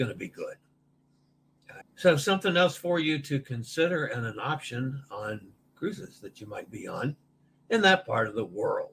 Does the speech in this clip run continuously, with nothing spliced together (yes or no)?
no